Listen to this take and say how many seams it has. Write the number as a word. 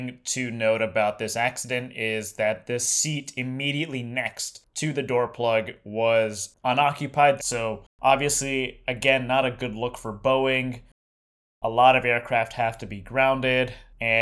one